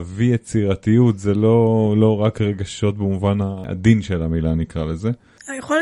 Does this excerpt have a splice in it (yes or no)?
no